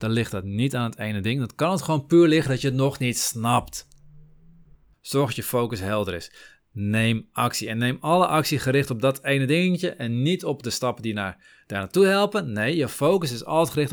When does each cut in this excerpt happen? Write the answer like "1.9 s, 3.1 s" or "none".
4.9 s